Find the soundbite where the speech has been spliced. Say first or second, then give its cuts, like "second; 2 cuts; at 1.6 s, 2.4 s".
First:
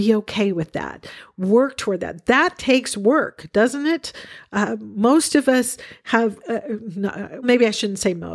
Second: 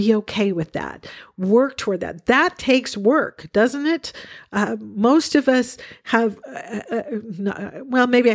first; 2 cuts; at 6.4 s, 7.4 s